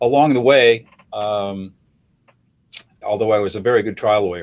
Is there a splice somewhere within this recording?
yes; 1 cut; at 3.0 s

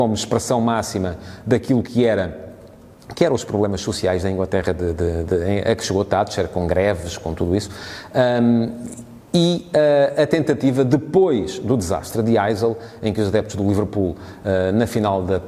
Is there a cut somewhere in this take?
no; 0 cuts

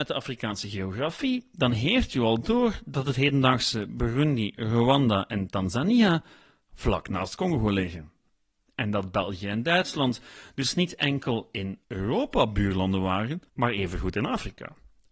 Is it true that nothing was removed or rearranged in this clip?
no; 2 cuts; at 11.8 s, 13.5 s

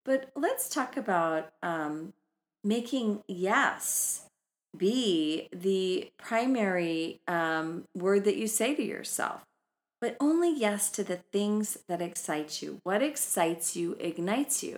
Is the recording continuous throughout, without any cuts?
yes; 0 cuts

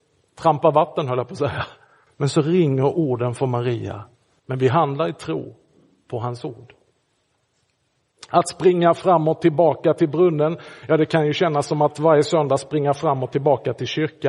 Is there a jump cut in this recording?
yes; 2 cuts; at 2.1 s, 4.4 s

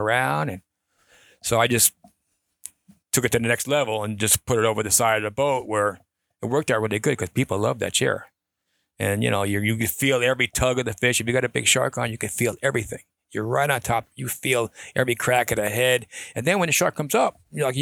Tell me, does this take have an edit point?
no; 0 cuts

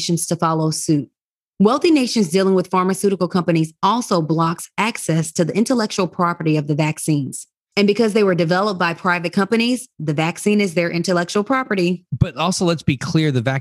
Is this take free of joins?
no; 1 cut; at 12.1 s

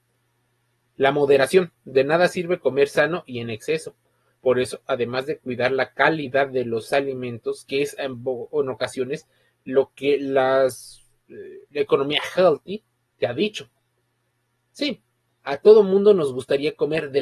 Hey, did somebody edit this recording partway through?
no; 0 cuts

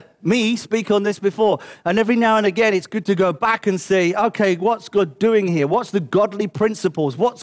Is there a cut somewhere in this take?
yes; 1 cut; at 1.8 s

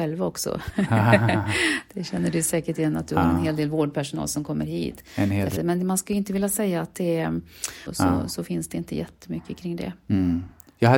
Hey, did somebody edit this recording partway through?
yes; 2 cuts; at 5.6 s, 7.9 s

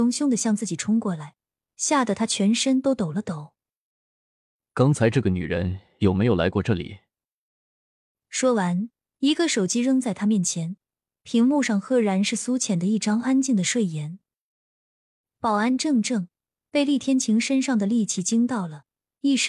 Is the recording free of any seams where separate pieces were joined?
yes; 0 cuts

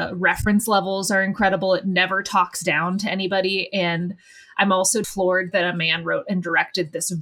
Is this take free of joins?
no; 1 cut; at 5.0 s

